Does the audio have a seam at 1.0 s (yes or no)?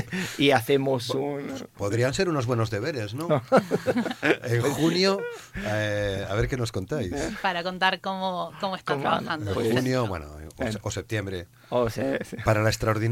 no